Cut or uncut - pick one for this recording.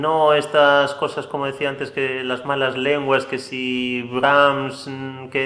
uncut